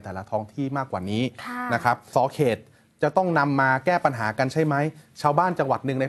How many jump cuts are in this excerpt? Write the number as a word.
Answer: one